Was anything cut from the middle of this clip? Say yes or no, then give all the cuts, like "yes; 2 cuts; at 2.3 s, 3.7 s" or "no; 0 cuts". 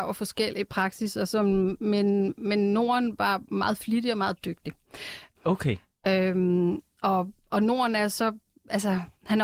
yes; 1 cut; at 5.4 s